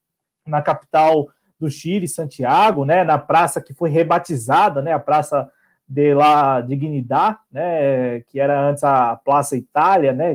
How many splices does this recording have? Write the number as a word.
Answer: zero